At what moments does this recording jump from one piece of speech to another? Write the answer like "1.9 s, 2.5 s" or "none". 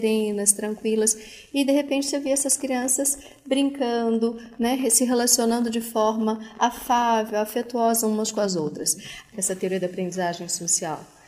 9.3 s